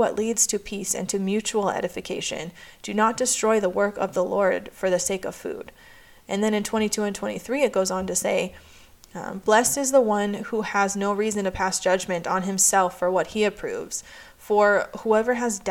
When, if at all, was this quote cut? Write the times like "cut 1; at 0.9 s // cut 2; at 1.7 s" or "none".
cut 1; at 9.4 s